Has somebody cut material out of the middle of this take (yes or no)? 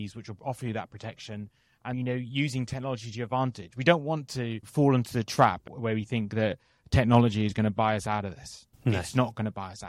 yes